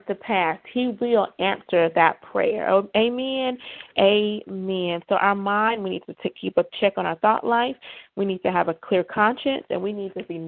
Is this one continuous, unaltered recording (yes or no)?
yes